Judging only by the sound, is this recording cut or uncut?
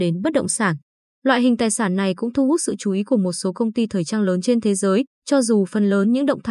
cut